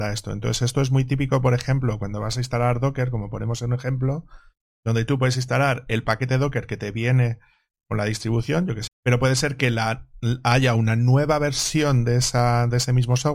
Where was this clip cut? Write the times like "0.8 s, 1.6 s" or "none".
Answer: 8.9 s